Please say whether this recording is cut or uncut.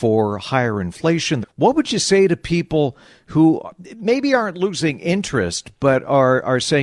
cut